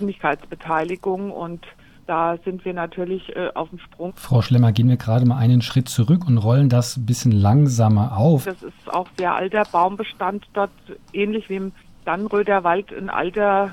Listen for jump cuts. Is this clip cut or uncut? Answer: cut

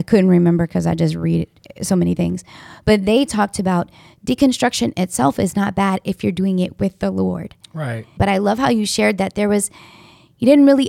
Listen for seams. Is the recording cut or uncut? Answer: cut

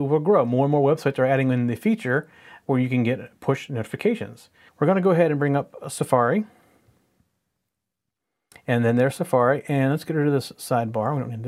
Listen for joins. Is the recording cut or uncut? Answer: cut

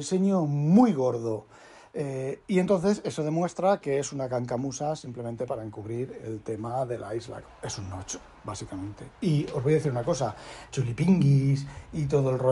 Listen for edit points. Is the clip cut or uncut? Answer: cut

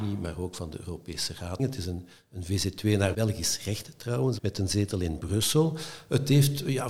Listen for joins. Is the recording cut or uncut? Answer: cut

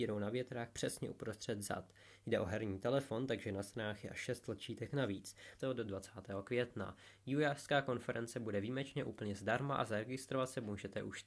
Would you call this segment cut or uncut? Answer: cut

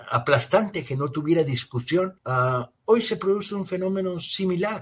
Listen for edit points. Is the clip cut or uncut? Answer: cut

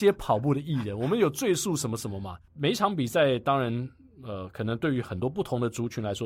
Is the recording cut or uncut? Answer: cut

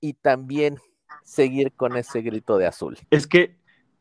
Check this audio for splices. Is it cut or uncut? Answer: cut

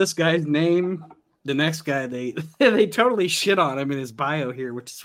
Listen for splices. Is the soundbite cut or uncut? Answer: uncut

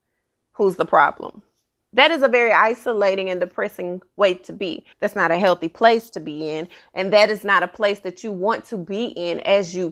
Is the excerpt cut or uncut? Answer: cut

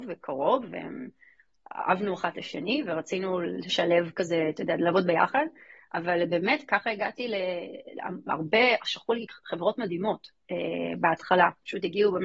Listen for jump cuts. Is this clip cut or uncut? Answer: uncut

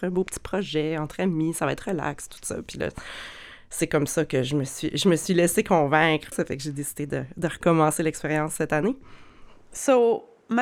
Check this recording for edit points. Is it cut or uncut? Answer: cut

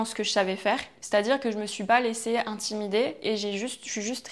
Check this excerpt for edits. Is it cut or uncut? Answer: cut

